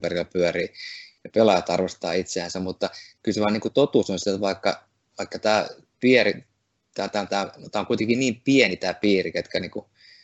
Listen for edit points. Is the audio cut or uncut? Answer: uncut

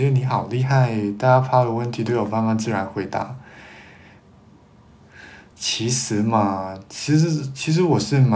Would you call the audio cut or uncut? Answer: cut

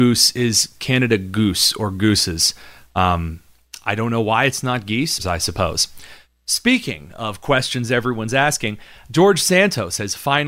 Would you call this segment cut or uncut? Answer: cut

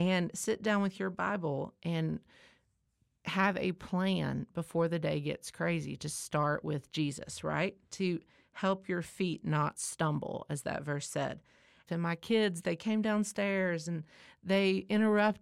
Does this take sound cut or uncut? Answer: cut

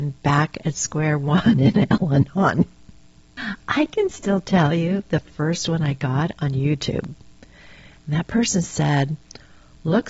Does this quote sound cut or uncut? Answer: cut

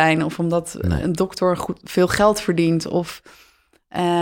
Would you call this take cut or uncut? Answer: uncut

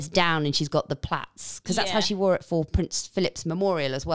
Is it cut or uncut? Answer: uncut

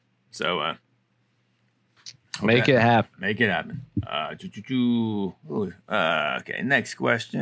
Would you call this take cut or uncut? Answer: uncut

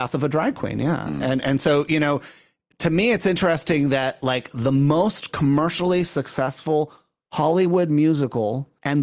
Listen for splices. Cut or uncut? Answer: uncut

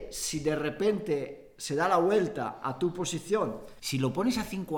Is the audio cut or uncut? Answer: cut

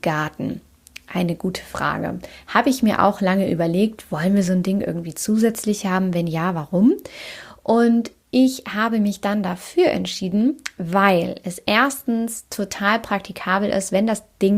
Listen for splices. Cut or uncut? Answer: uncut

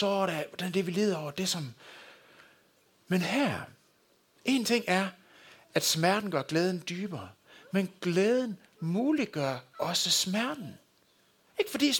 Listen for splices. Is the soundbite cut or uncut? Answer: uncut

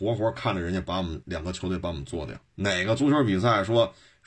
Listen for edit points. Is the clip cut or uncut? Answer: cut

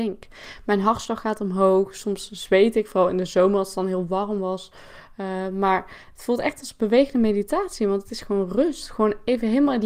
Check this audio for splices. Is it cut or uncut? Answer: uncut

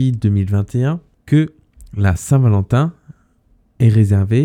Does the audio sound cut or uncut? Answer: uncut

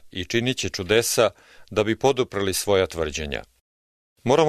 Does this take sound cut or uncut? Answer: uncut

